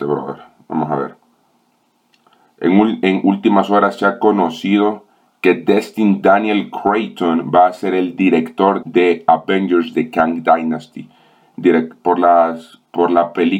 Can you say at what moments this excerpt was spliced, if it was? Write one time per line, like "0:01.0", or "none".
0:08.8
0:12.0